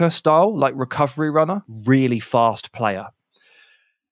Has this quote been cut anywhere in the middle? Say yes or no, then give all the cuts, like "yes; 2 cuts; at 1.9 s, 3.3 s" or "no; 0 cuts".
yes; 1 cut; at 1.7 s